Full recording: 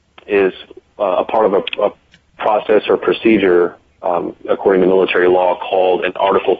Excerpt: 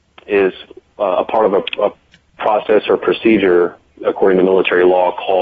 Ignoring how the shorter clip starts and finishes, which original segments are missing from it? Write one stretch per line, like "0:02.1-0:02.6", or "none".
0:04.0-0:04.4